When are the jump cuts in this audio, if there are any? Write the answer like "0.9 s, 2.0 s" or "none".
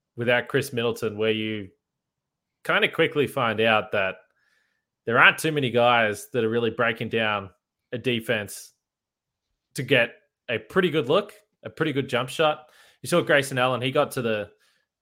none